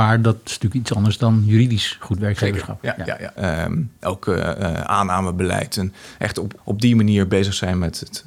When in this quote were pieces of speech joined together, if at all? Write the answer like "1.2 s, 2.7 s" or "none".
3.4 s, 6.6 s